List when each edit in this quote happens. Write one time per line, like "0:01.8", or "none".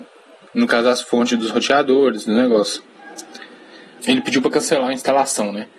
0:04.0